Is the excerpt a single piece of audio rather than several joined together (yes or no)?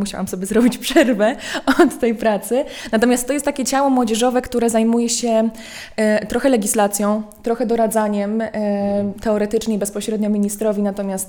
yes